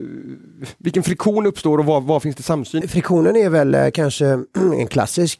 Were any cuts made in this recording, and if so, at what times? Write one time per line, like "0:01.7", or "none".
0:02.8

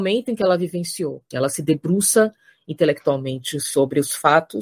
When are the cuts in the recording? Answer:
0:01.3

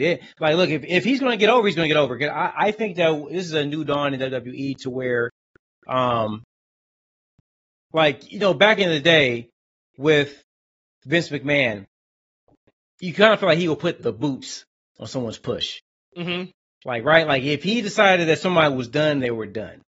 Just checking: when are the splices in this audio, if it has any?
0:14.0

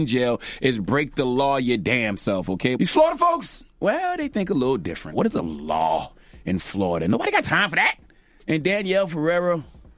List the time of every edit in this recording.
0:02.7
0:05.1

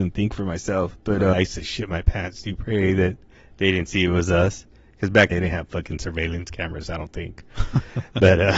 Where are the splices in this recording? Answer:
0:01.3
0:05.3

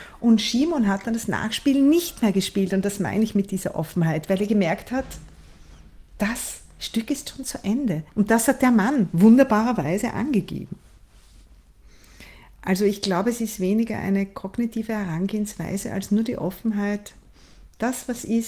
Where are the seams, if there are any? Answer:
0:08.1

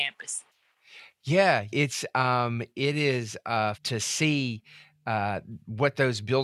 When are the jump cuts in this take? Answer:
0:01.7
0:03.7

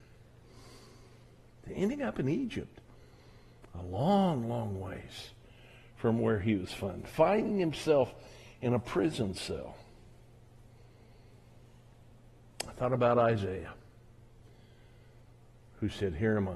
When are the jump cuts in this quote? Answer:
none

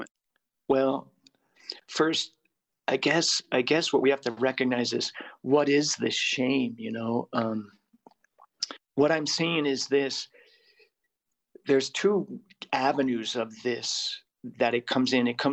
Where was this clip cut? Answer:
none

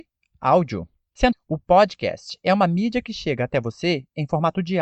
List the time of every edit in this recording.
0:01.3

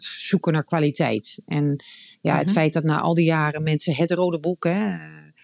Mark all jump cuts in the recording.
none

